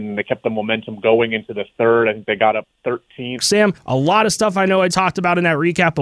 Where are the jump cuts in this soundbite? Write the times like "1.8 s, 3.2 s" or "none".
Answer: 3.4 s, 4.9 s